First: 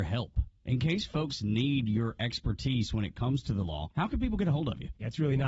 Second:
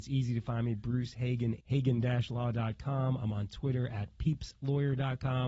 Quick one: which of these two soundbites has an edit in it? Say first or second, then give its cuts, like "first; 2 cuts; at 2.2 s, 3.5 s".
second; 1 cut; at 1.6 s